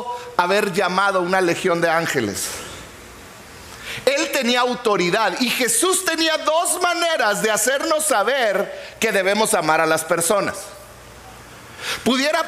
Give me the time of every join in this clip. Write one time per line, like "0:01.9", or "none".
none